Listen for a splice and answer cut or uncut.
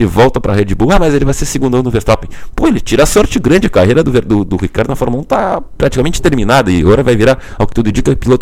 uncut